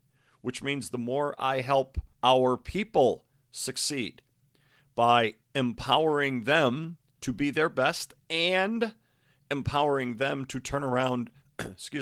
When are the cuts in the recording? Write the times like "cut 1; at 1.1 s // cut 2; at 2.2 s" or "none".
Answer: cut 1; at 2.1 s // cut 2; at 5.4 s